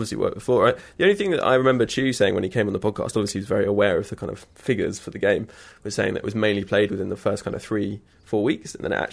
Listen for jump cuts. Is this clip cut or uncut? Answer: uncut